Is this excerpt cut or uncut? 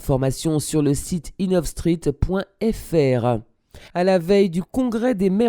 cut